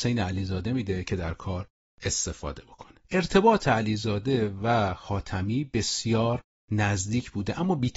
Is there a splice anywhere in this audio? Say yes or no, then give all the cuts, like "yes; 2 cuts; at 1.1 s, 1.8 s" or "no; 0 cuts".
yes; 1 cut; at 3.0 s